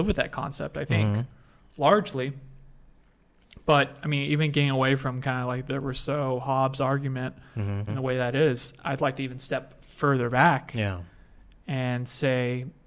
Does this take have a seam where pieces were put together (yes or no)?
yes